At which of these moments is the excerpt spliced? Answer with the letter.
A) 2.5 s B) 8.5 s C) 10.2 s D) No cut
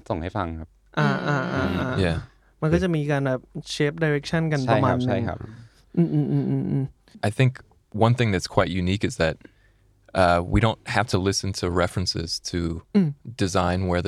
D